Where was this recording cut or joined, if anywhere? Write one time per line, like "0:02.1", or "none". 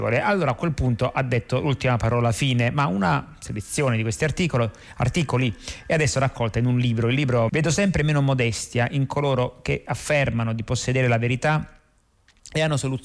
0:07.5